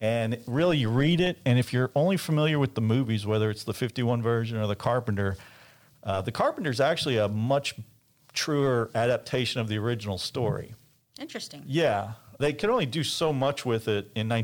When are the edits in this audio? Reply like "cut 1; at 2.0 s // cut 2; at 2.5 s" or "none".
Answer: none